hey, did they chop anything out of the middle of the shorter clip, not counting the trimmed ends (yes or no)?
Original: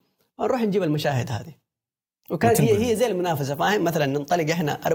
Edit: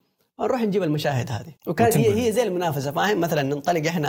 yes